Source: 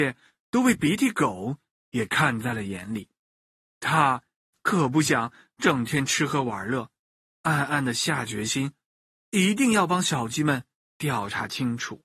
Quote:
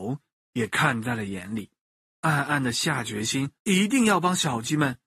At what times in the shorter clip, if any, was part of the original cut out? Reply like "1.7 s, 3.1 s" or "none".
2.0 s, 3.6 s